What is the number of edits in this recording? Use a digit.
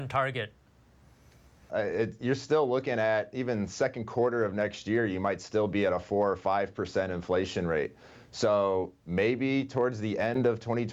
1